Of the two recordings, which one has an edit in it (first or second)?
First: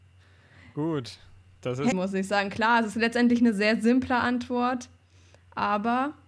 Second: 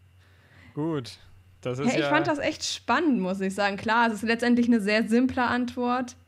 first